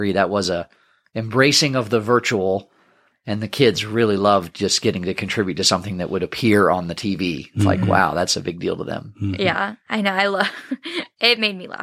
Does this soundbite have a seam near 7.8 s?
no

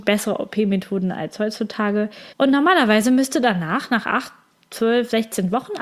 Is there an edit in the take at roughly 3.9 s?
no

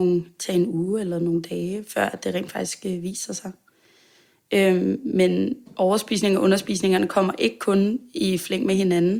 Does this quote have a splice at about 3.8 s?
no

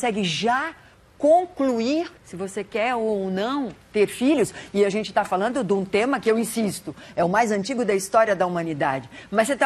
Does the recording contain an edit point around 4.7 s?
no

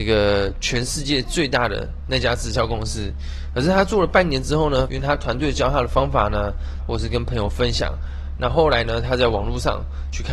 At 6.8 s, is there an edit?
yes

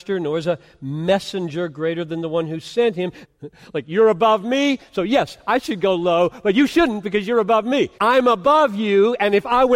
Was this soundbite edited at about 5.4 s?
no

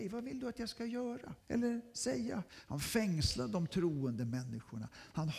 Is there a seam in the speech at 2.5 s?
yes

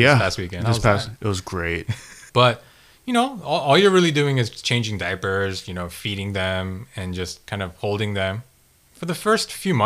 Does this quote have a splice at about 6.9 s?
no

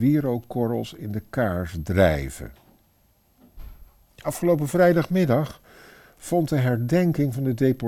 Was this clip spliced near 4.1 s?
yes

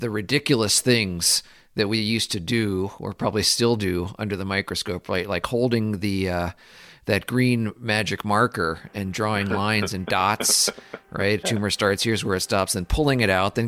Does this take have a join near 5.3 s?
no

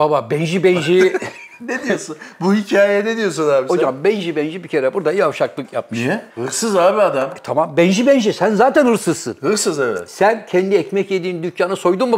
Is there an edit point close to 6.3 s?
yes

